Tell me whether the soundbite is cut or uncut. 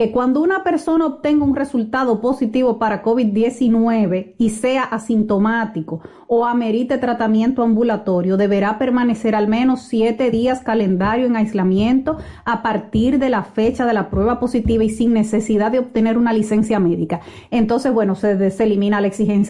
cut